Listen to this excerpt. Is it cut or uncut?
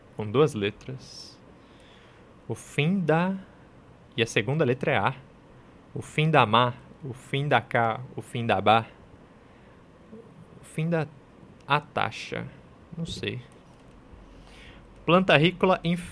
uncut